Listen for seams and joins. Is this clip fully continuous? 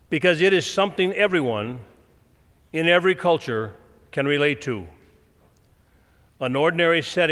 yes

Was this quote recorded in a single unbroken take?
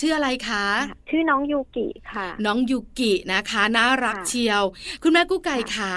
no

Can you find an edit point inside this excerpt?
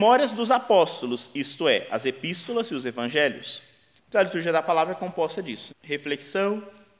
yes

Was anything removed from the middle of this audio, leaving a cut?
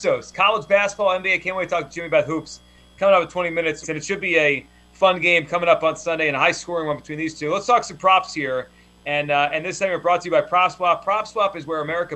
yes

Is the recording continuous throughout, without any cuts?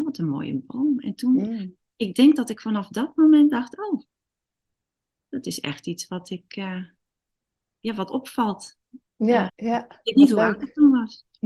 no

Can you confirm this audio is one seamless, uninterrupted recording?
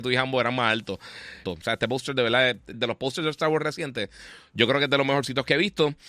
no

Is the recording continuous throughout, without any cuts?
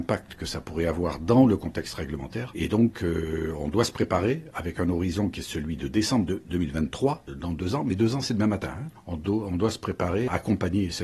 yes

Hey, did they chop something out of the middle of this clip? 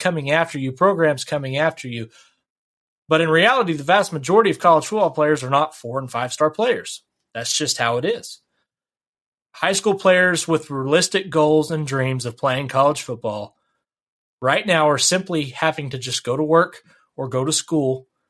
yes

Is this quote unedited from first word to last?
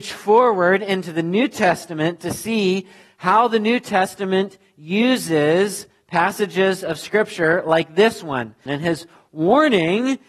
no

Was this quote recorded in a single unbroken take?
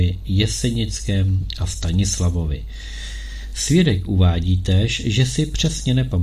yes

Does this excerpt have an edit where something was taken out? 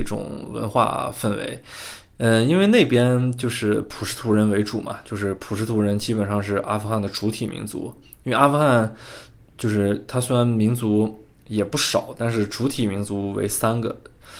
no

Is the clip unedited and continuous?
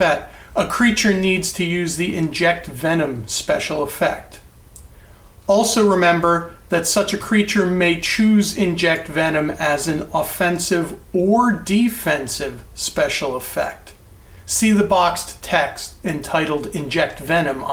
yes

